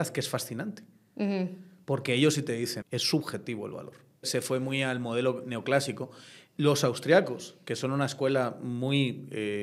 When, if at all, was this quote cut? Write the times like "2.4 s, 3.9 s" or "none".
2.8 s, 4.2 s